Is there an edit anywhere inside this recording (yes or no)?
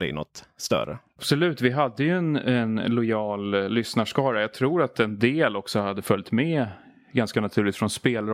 no